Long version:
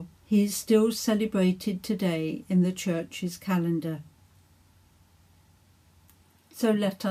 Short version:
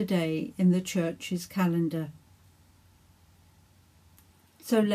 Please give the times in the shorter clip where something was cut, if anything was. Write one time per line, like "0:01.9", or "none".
none